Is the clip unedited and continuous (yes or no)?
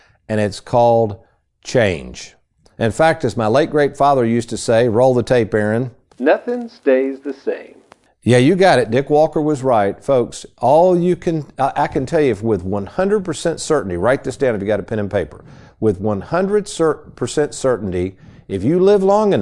yes